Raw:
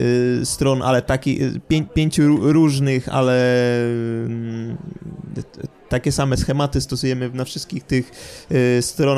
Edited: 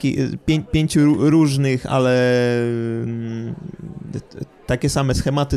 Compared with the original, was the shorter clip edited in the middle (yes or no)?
no